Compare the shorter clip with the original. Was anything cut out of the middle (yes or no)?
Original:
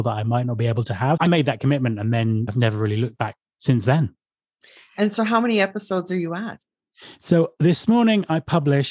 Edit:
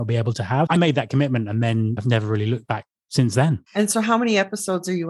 yes